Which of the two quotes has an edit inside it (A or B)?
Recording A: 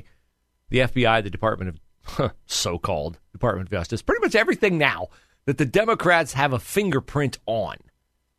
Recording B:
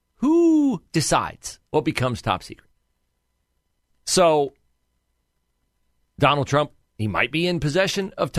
B